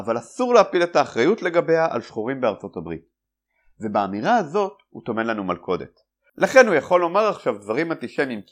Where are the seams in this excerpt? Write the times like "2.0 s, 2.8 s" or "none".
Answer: 6.3 s